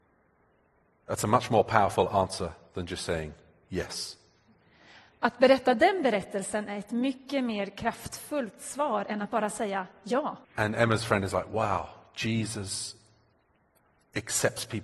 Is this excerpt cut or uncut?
cut